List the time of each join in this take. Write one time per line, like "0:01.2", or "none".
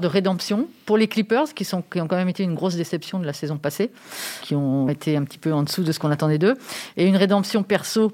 0:04.9